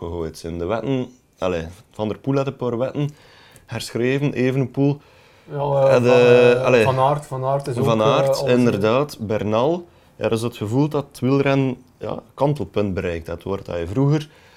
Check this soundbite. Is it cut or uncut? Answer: uncut